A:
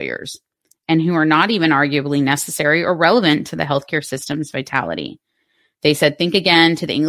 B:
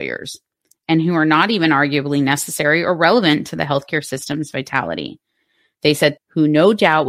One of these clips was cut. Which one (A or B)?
B